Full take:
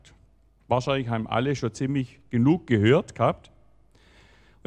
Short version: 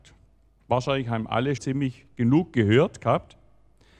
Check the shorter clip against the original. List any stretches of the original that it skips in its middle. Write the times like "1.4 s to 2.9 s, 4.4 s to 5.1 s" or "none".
1.6 s to 1.7 s